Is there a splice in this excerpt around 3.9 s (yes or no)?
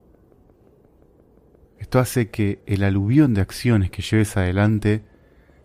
no